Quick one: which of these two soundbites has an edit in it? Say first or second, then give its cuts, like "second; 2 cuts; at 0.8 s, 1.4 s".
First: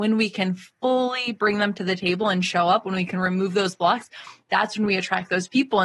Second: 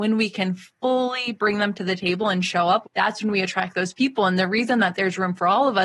second; 1 cut; at 2.8 s